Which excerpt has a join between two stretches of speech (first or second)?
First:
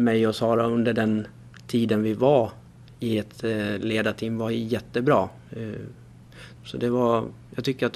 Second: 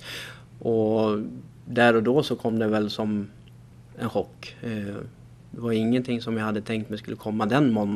first